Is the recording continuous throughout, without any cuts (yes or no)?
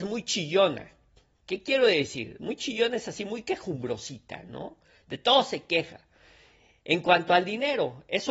yes